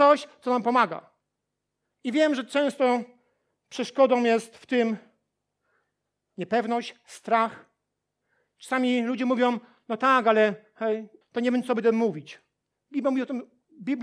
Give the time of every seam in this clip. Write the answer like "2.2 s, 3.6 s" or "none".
1.9 s, 11.2 s